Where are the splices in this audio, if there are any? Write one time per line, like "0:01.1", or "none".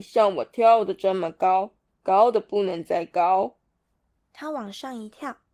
none